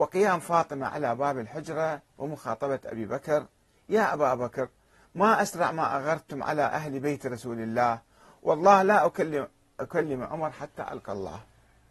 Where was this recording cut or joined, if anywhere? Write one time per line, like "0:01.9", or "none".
none